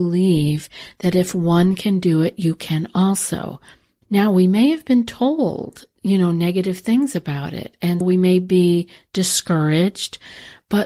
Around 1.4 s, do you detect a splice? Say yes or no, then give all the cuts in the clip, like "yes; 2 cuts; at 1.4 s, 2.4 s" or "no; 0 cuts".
no; 2 cuts; at 4.0 s, 8.0 s